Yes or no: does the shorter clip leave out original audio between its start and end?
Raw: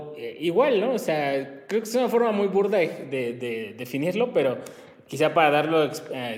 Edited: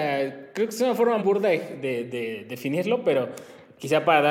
yes